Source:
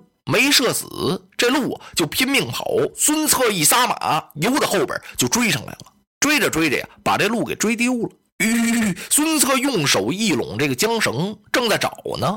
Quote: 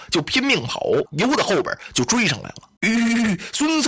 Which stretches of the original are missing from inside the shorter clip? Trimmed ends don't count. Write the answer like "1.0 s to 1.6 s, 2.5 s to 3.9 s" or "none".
2.9 s to 4.3 s, 6.0 s to 8.3 s